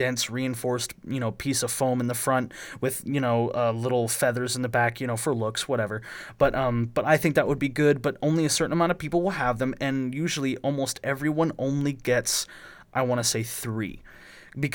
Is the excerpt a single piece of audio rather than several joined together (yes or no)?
yes